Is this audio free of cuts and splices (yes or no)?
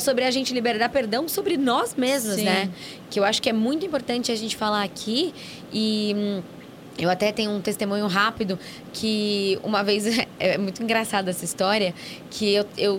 yes